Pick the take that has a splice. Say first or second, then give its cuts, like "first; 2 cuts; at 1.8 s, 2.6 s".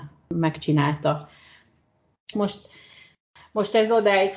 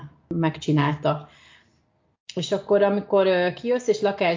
first; 1 cut; at 2.3 s